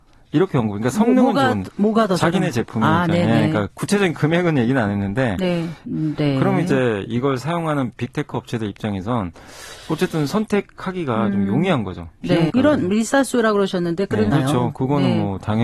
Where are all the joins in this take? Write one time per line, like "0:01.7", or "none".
0:05.8
0:12.5
0:14.3